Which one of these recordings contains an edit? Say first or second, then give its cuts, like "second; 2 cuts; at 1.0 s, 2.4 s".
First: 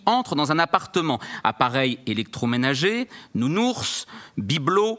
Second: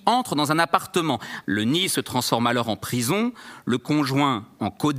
second; 1 cut; at 1.4 s